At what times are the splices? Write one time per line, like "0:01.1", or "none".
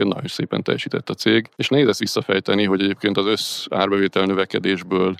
none